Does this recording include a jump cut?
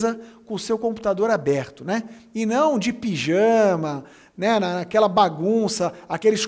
no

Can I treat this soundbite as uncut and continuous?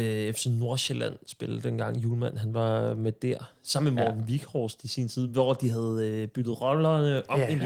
yes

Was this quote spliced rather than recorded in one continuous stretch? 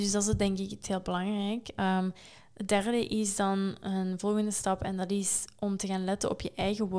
no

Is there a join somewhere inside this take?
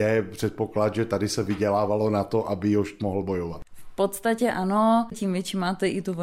yes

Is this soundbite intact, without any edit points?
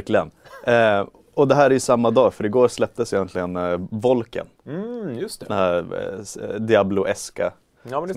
yes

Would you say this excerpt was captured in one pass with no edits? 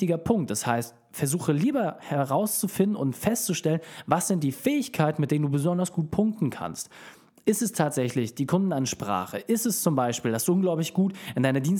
yes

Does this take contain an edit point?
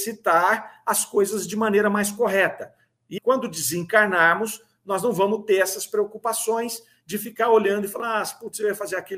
yes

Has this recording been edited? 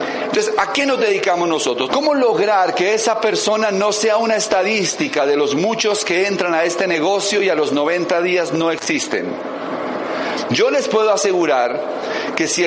yes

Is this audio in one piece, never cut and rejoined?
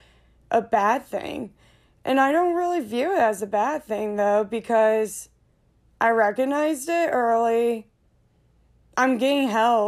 yes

